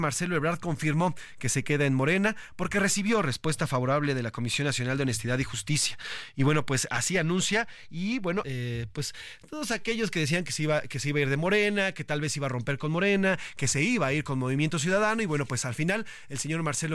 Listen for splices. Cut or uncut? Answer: cut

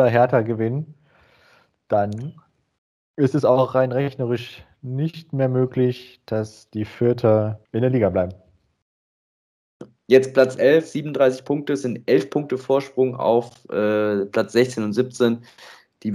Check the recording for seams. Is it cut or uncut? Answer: cut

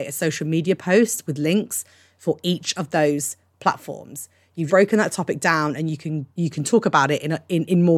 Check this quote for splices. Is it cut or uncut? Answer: cut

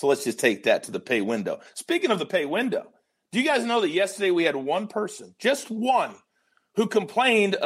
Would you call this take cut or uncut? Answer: uncut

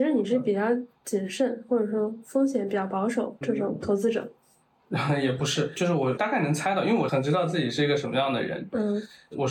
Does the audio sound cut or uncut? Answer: uncut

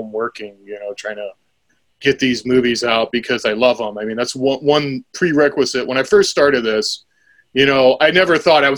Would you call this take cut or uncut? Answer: uncut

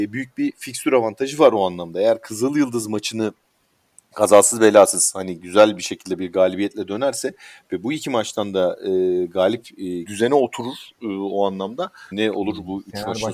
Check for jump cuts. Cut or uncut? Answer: cut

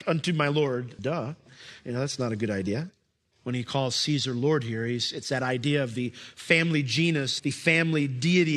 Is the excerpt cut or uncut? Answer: cut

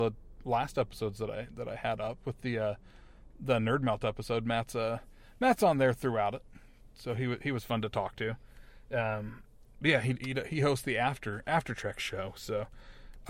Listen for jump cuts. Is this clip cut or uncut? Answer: uncut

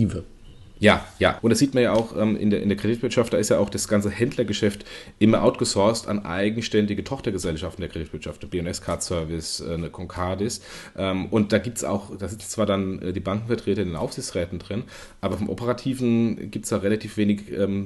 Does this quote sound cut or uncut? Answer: cut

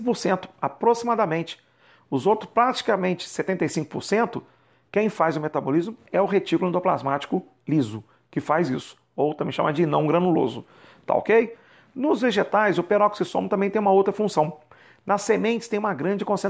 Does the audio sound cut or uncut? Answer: uncut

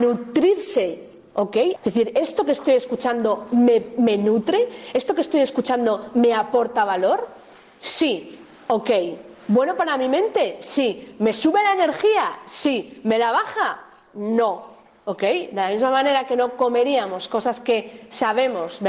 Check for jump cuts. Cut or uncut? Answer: cut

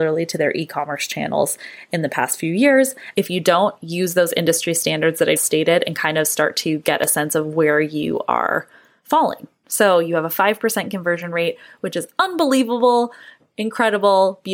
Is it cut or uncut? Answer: cut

